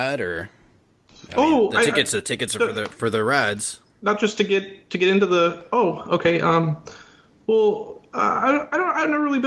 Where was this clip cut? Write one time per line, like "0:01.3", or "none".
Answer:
none